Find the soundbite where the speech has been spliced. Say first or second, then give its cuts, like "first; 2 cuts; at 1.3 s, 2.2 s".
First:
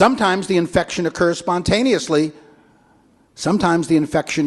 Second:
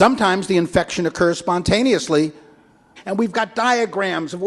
second; 1 cut; at 3.0 s